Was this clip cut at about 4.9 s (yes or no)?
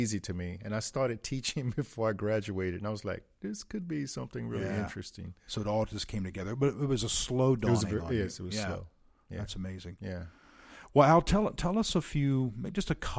no